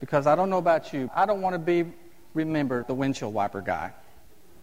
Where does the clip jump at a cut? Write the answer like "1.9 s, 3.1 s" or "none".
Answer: 1.1 s, 2.8 s